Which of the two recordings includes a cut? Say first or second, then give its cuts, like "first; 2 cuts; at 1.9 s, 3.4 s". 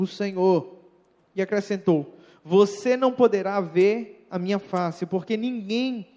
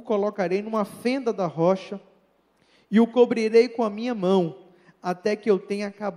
first; 1 cut; at 1.2 s